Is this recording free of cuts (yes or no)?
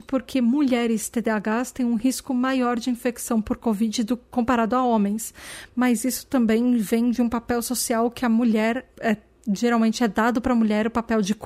no